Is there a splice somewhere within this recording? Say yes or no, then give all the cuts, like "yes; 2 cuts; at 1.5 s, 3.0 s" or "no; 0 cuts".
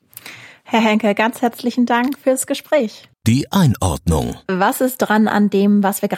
yes; 1 cut; at 3.1 s